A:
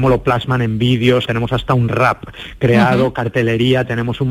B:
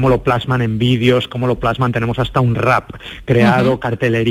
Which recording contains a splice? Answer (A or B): A